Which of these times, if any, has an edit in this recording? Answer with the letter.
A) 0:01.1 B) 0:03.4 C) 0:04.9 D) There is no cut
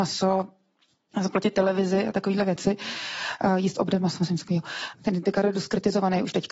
C